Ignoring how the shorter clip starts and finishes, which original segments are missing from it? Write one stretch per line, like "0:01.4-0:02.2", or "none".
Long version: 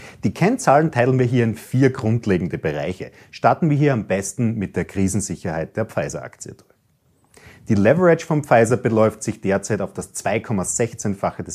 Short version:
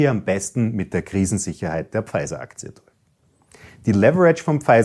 none